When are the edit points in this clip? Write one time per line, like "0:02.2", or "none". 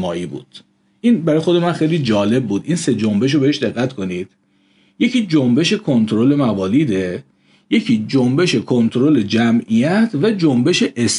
none